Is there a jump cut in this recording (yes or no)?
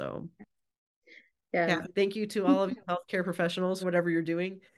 yes